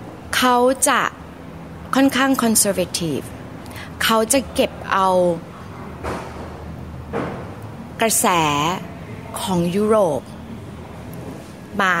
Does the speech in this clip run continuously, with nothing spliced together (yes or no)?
yes